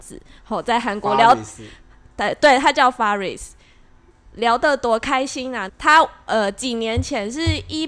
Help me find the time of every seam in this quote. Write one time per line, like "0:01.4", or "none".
0:05.7